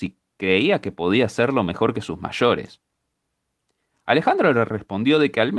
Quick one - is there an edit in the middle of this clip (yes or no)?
no